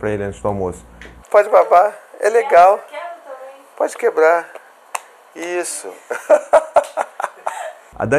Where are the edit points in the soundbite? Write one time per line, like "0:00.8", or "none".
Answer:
0:01.2